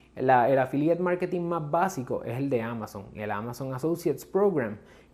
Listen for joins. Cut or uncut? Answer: uncut